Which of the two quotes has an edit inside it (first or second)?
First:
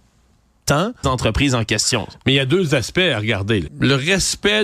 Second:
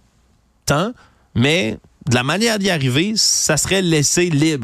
first